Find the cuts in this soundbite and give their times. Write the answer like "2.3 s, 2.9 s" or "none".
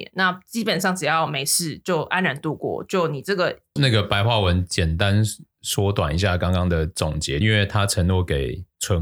3.8 s, 7.4 s